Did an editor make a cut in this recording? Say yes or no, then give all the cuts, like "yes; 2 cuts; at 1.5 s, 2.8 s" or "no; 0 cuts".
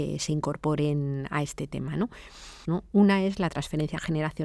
yes; 1 cut; at 2.6 s